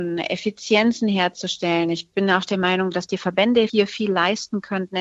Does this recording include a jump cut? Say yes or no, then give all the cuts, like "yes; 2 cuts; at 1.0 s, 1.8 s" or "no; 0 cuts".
no; 0 cuts